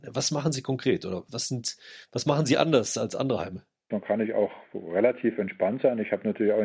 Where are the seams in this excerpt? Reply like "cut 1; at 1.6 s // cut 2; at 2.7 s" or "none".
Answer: cut 1; at 1.3 s // cut 2; at 3.9 s